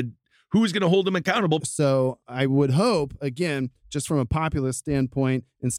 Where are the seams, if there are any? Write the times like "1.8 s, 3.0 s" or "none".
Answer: 1.6 s